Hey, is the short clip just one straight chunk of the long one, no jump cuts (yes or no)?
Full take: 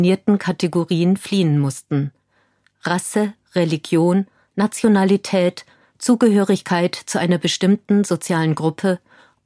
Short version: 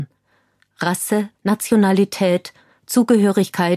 no